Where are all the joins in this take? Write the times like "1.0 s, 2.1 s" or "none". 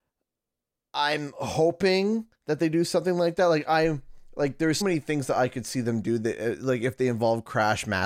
4.8 s